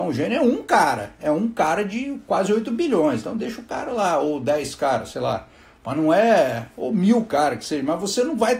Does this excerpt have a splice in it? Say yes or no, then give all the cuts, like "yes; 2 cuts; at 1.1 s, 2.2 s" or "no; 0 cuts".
no; 0 cuts